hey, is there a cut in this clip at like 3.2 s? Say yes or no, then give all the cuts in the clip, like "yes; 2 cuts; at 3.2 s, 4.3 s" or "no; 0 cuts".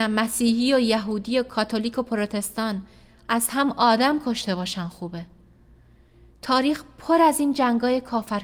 no; 0 cuts